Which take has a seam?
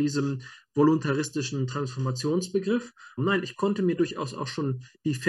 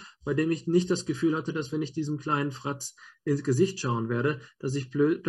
first; 1 cut; at 3.2 s

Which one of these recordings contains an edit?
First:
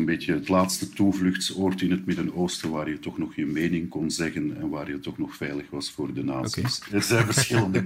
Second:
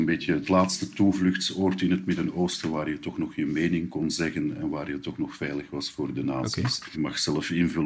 first; 1 cut; at 6.9 s

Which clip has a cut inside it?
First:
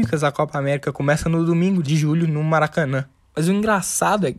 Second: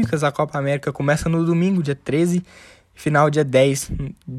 first; 2 cuts; at 1.8 s, 3.2 s

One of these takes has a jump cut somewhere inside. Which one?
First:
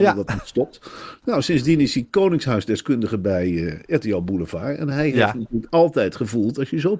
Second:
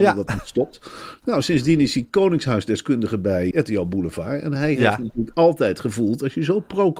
second; 1 cut; at 3.5 s

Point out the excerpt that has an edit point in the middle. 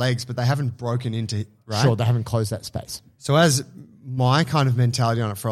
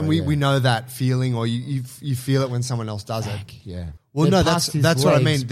second; 1 cut; at 4.0 s

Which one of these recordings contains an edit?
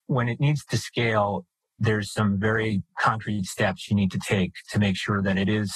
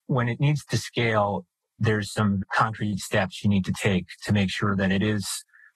second; 1 cut; at 2.4 s

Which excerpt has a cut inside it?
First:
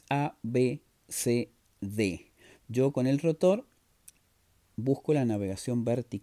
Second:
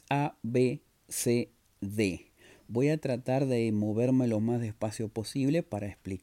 first; 1 cut; at 2.6 s

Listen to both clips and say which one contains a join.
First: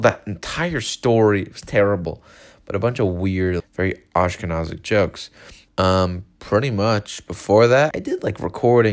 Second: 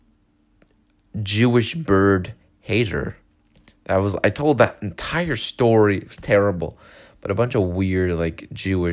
first; 3 cuts; at 3.6 s, 5.7 s, 7.9 s

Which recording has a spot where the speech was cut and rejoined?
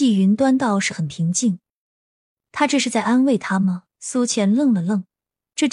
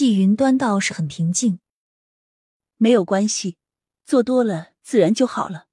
first; 2 cuts; at 2.3 s, 3.9 s

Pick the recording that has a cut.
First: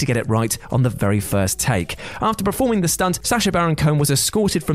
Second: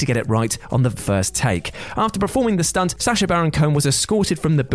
second; 1 cut; at 1.0 s

